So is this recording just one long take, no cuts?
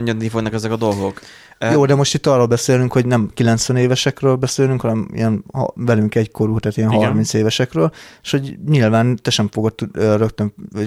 yes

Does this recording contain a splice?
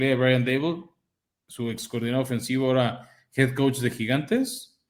no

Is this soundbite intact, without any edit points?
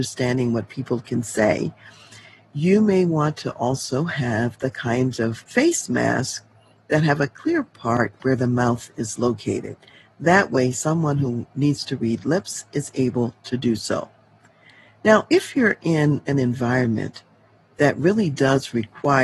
yes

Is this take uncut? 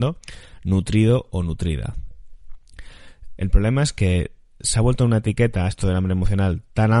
no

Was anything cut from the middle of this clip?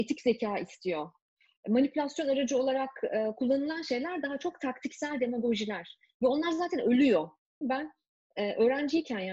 yes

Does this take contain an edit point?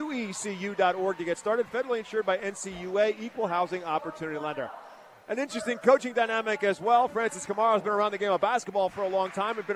no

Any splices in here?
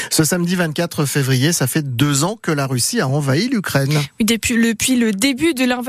no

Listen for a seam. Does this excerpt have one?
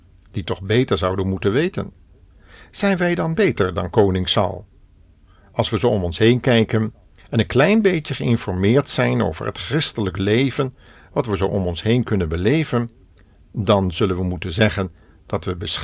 no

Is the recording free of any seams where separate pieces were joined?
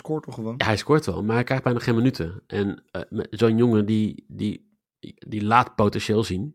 yes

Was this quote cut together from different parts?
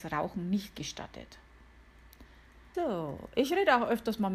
yes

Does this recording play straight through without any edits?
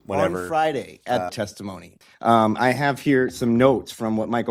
no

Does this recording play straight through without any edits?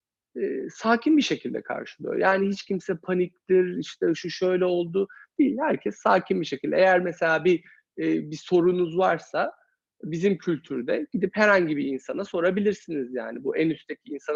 yes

